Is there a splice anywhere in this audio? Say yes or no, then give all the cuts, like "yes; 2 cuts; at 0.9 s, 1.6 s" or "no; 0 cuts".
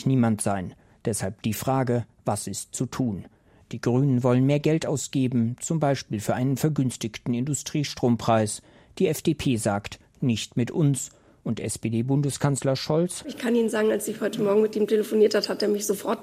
no; 0 cuts